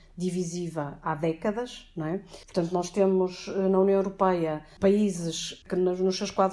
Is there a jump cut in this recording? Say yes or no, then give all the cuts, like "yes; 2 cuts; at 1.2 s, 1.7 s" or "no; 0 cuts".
yes; 1 cut; at 2.4 s